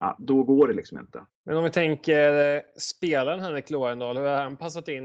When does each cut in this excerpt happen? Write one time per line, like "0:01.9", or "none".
0:01.3